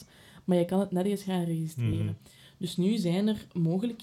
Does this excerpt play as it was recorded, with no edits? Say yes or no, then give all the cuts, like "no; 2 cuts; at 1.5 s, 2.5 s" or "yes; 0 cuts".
yes; 0 cuts